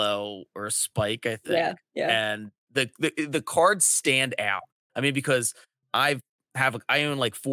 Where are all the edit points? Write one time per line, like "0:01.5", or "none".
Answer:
none